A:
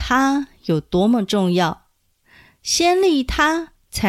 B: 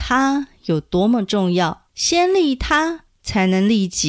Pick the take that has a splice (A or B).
B